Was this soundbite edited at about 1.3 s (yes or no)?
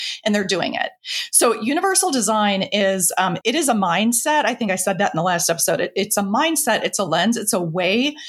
no